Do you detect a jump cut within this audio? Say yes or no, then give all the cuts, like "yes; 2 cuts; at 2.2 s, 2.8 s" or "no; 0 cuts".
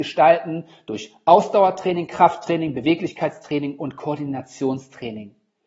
no; 0 cuts